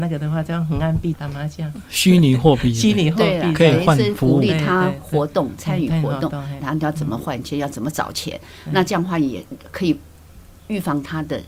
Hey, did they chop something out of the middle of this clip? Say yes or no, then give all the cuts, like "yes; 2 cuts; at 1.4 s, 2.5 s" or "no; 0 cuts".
yes; 2 cuts; at 1.1 s, 6.6 s